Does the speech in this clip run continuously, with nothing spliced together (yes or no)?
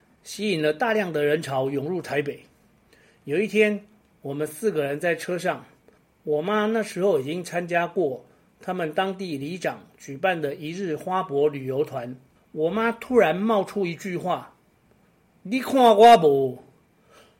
no